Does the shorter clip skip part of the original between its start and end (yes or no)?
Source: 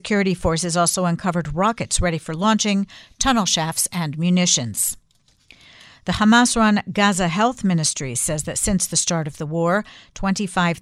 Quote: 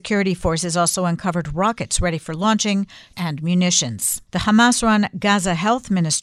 yes